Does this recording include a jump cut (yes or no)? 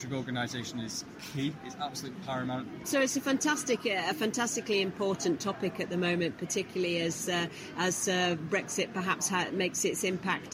yes